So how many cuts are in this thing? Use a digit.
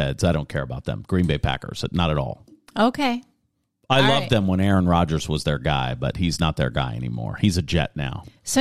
0